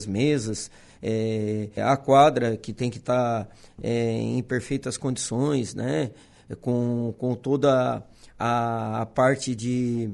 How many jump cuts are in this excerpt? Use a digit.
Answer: 1